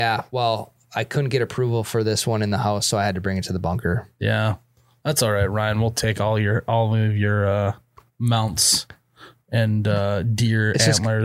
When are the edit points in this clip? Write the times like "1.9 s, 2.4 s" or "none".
none